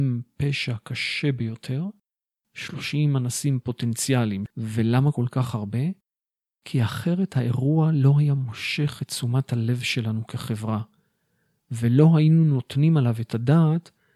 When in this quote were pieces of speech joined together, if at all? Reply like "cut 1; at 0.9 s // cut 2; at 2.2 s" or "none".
cut 1; at 2.4 s